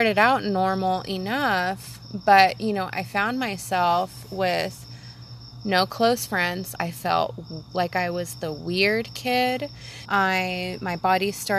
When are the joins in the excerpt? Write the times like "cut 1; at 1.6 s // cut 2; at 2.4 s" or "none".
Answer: cut 1; at 6.8 s // cut 2; at 10.0 s